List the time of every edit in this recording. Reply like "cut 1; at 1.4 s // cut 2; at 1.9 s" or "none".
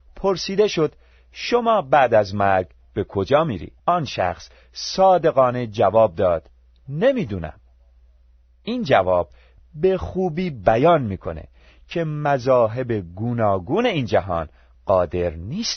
cut 1; at 3.8 s